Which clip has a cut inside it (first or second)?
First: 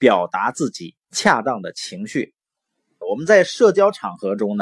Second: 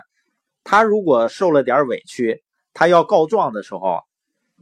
first